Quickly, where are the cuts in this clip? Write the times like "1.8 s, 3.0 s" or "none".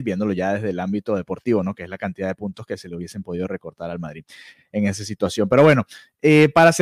none